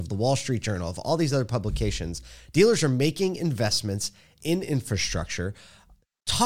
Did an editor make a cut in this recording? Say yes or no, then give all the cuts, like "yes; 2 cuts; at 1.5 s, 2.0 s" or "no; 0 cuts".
no; 0 cuts